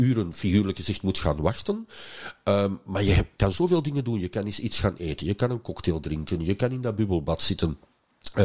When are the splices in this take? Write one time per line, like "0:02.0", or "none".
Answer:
none

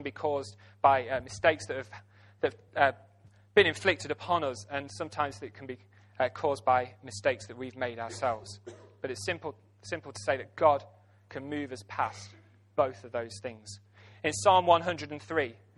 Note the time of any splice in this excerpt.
none

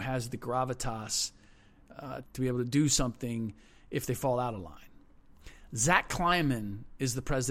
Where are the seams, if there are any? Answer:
0:02.2

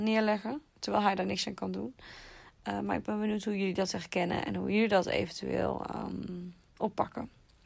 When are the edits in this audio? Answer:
none

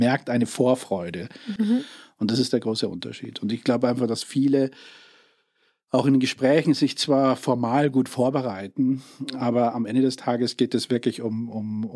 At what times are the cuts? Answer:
0:01.6

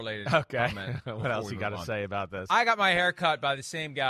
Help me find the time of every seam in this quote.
none

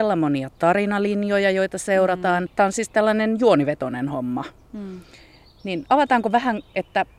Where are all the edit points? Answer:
0:02.5

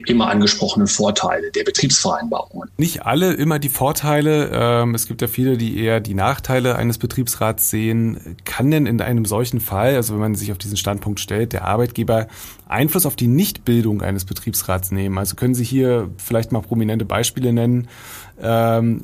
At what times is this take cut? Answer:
none

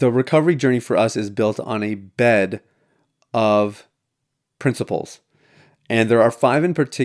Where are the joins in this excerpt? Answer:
none

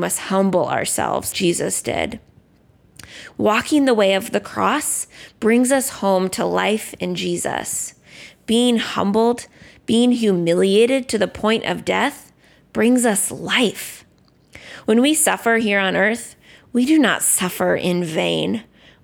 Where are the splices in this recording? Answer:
0:01.3
0:03.3

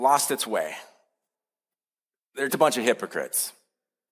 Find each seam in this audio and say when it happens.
0:02.5

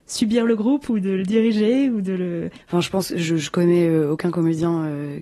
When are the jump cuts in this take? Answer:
0:02.6

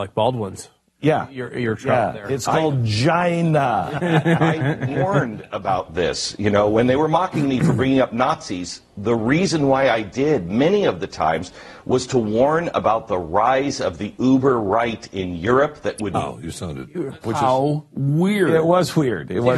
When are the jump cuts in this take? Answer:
0:16.1
0:17.2

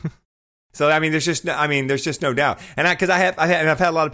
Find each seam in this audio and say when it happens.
none

